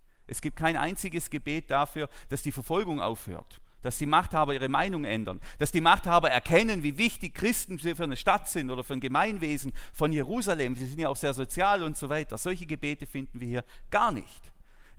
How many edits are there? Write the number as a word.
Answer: zero